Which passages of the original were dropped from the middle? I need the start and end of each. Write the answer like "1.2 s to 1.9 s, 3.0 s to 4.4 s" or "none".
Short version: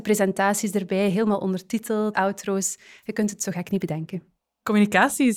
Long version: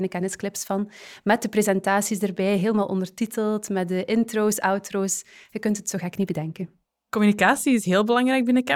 3.6 s to 4.6 s